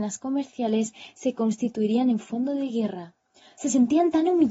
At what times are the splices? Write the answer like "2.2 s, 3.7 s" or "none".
3.6 s